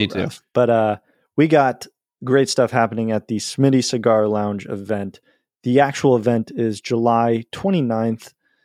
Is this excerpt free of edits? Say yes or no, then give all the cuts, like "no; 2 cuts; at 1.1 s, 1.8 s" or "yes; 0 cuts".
yes; 0 cuts